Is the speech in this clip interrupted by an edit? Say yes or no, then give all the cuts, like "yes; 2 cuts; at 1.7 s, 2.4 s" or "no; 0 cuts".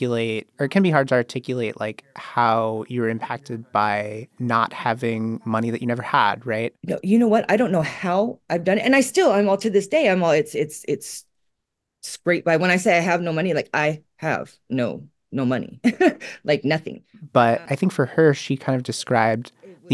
yes; 1 cut; at 17.7 s